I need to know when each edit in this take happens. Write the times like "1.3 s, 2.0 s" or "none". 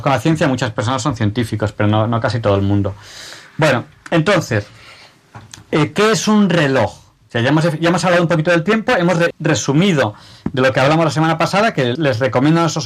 9.3 s, 12.0 s